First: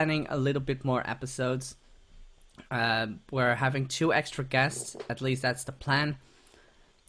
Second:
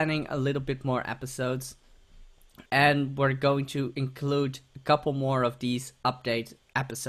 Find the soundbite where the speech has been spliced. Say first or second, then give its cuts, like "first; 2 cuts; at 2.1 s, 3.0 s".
second; 1 cut; at 2.7 s